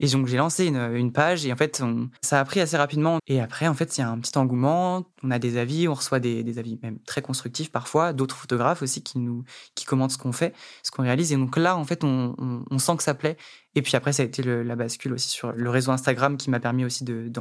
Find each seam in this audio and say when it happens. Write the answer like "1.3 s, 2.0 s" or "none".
2.2 s, 3.2 s